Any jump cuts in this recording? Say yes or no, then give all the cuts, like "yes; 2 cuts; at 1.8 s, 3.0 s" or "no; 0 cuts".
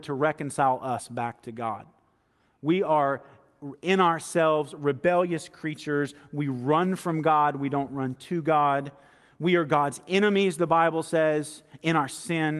no; 0 cuts